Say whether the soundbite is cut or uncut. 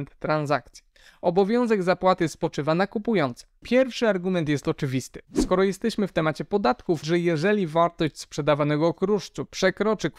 cut